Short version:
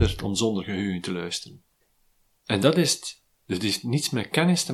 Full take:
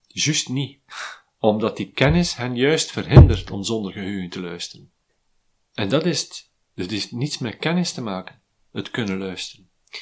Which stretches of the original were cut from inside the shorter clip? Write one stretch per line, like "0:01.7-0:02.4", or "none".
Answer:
none